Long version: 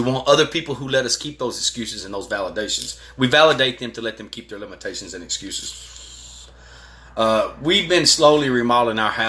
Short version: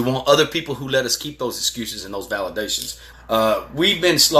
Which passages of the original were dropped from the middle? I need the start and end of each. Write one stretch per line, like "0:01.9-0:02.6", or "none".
0:03.1-0:07.0

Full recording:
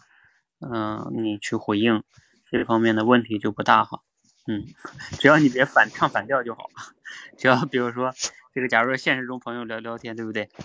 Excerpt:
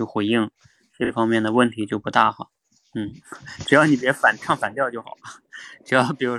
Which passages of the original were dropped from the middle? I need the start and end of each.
none

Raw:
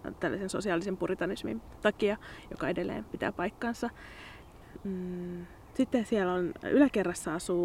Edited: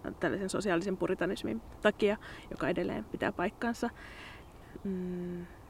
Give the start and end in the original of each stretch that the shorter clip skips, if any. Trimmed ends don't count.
none

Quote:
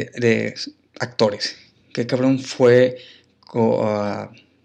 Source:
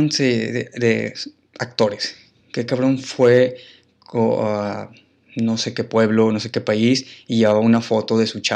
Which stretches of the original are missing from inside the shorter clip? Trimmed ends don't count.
none

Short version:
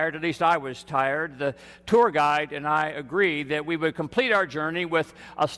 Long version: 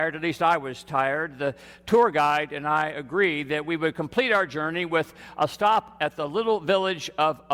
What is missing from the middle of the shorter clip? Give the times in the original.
none

